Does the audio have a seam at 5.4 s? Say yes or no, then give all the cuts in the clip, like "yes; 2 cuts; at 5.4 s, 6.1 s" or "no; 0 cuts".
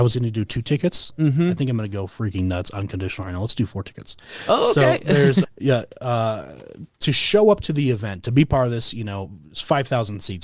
yes; 1 cut; at 5.4 s